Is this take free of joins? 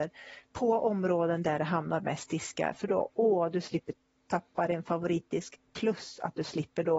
yes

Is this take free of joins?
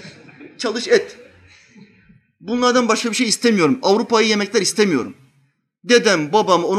yes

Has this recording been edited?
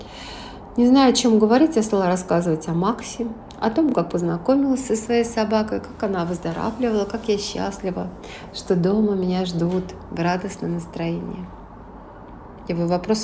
no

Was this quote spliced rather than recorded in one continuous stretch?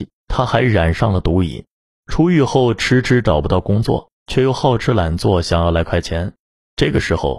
no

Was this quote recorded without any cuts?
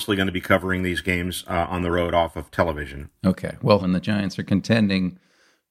no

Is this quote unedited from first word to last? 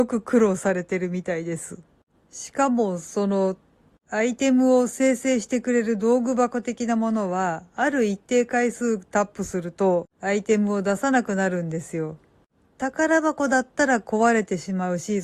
yes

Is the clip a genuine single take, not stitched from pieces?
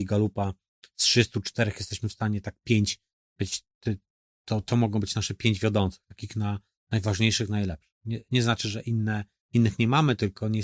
yes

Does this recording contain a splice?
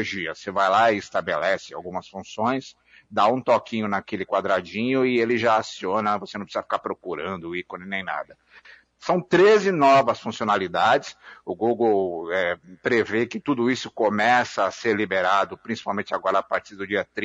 no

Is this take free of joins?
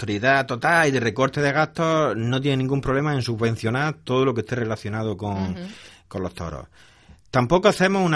yes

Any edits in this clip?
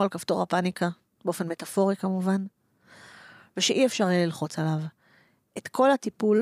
no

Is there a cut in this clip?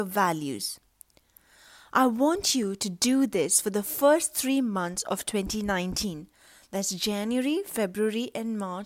no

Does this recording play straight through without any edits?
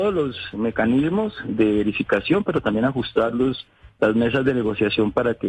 yes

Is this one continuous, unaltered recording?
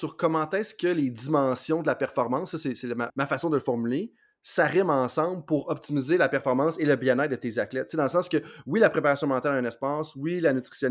no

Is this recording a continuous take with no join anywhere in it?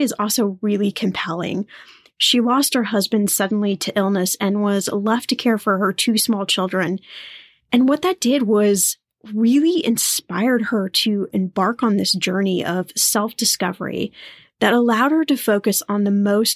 yes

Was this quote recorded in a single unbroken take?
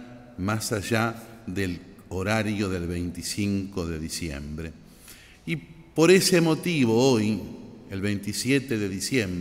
yes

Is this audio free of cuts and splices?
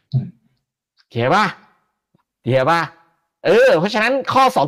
yes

